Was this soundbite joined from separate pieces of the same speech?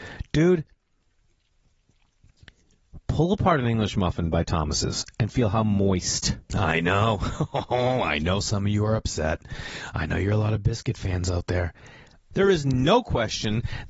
yes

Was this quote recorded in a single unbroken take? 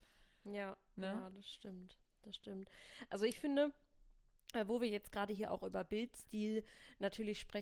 yes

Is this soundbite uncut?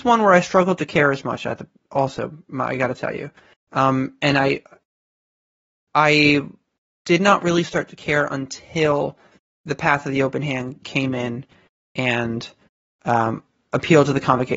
yes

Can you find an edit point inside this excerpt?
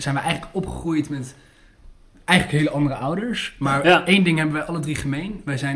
no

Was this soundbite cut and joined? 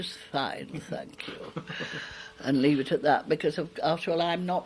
no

